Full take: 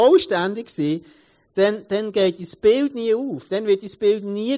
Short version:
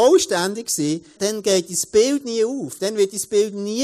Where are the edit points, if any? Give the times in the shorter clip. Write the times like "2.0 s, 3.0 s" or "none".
1.2 s

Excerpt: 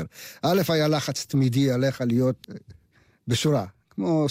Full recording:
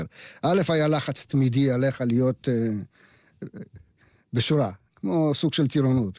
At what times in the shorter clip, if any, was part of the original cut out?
2.4 s

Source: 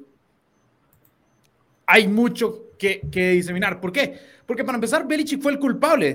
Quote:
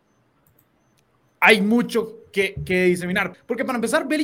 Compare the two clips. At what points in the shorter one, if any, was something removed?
3.3 s

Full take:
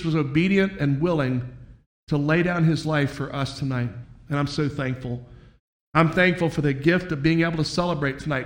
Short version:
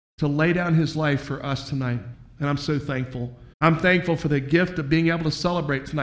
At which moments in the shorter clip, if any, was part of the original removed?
3.5 s

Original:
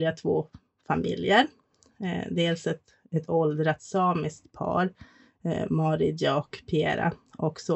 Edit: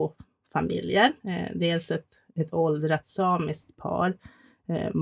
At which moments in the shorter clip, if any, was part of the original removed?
1.2 s

